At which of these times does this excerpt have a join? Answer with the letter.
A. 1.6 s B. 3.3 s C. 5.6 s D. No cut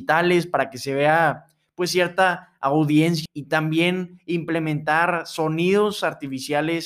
B